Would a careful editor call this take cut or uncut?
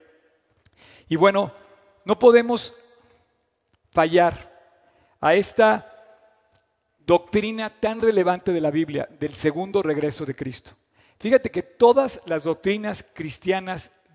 uncut